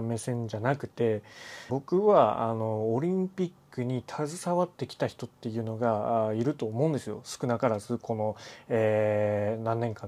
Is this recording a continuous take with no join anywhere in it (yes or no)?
no